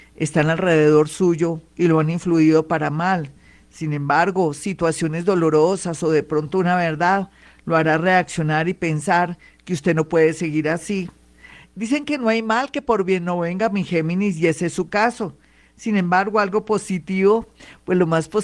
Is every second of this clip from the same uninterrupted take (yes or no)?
yes